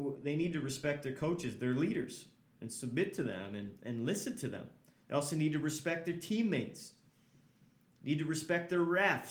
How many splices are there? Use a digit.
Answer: 0